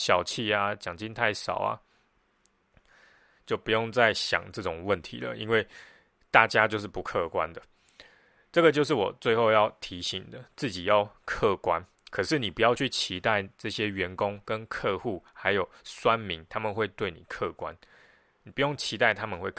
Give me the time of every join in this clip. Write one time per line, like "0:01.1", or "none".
none